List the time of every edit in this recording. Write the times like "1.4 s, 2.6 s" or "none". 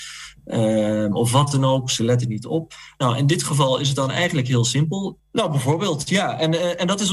5.2 s